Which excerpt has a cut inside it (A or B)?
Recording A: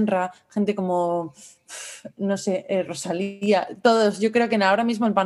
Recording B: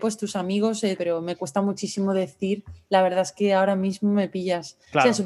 B